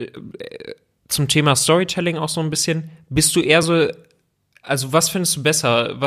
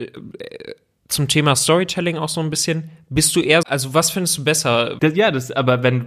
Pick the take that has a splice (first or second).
second